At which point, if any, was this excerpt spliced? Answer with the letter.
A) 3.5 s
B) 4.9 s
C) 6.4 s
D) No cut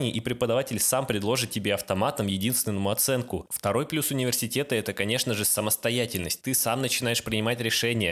A